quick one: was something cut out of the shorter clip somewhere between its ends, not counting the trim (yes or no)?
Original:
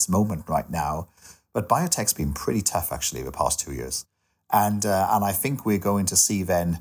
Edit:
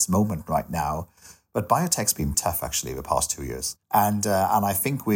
yes